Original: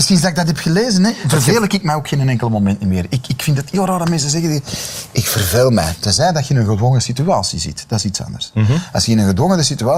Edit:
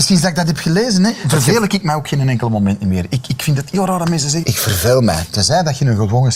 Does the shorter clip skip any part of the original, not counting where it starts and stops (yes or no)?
yes